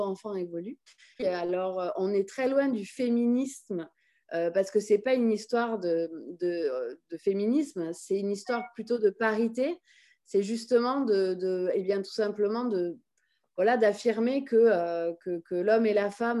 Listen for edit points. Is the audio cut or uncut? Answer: cut